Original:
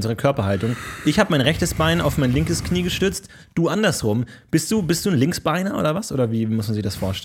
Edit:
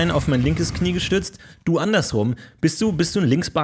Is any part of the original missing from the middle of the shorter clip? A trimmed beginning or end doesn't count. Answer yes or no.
no